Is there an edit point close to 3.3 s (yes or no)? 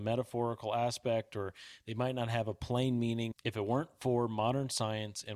yes